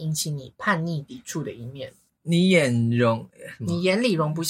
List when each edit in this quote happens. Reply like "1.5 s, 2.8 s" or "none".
2.1 s